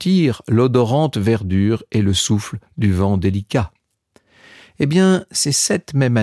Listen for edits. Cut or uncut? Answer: uncut